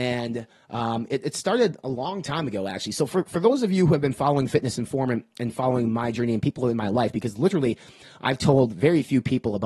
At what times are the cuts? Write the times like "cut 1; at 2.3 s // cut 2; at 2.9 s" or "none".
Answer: none